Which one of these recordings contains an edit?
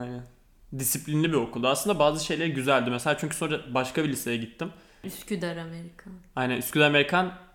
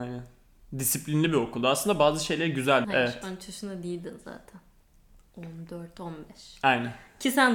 second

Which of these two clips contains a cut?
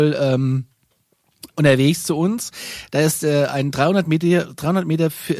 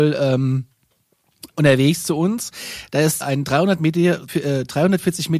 second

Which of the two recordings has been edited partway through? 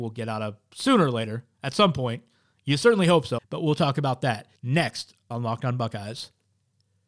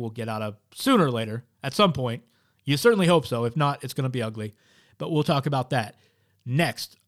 first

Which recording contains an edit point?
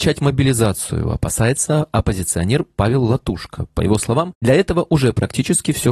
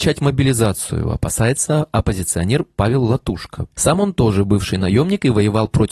second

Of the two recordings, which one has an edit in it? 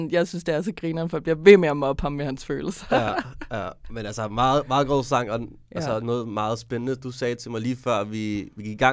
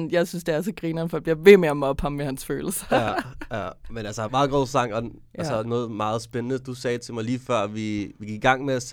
second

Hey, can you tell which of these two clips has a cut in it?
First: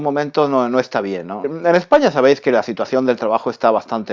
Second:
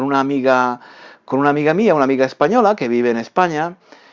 first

